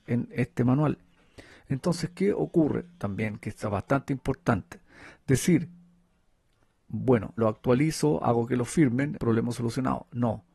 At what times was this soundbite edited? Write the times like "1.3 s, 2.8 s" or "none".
7.4 s, 9.2 s